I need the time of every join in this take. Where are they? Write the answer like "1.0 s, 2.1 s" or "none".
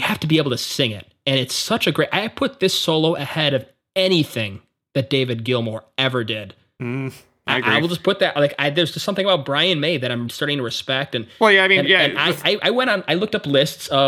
10.3 s